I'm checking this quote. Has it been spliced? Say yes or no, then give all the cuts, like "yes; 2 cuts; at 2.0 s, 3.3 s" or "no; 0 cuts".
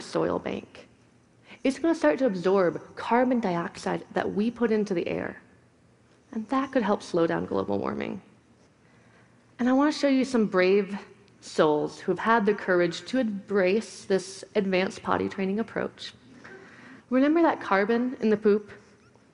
yes; 1 cut; at 17.0 s